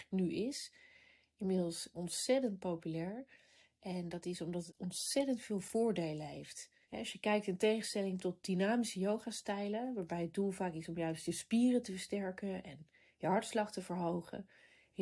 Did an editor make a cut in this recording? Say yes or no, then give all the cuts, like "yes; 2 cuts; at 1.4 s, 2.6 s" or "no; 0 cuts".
no; 0 cuts